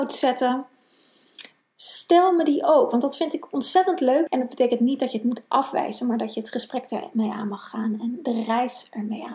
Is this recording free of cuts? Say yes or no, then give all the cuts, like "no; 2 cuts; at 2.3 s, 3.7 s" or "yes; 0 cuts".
no; 2 cuts; at 1.6 s, 4.3 s